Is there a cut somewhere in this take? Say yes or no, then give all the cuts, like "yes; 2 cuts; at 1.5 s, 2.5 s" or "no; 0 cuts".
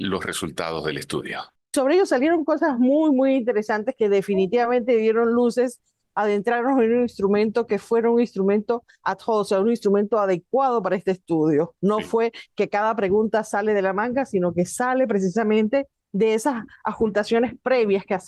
no; 0 cuts